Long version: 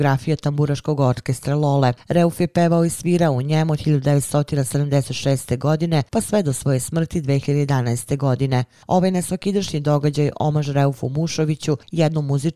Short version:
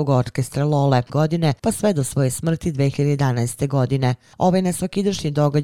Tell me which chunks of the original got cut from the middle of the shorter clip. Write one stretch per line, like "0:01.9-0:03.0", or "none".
0:02.0-0:05.6

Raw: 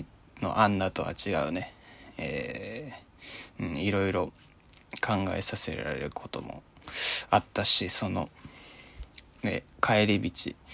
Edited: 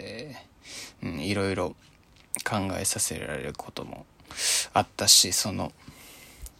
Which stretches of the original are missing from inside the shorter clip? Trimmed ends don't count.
none

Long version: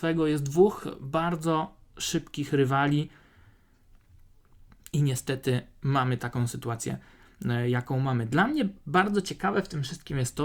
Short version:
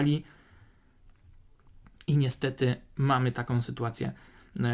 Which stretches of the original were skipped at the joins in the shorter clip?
none

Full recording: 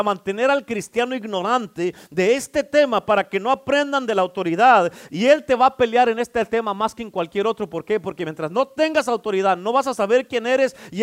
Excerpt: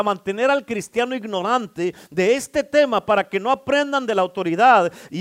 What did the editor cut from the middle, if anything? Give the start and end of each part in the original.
none

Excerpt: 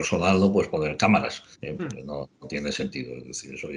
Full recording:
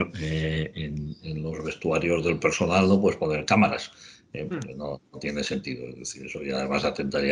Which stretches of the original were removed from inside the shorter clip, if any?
0:04.0-0:04.2

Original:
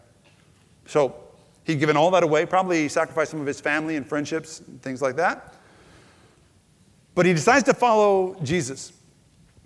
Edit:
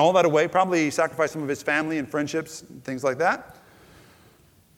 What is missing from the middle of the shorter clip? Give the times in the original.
none

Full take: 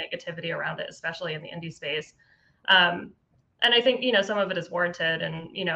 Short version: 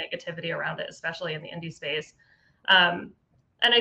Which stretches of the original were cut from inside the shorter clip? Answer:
none

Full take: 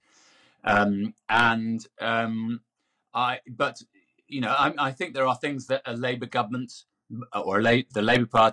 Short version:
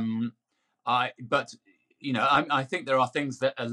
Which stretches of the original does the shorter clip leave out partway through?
none

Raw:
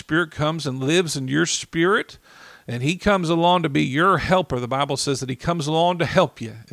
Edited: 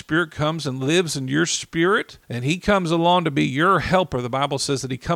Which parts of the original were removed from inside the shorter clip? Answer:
0:02.2-0:02.6

